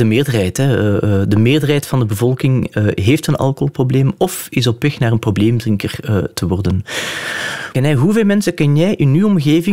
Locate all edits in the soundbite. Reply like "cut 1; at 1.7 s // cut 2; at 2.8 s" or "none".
cut 1; at 7.7 s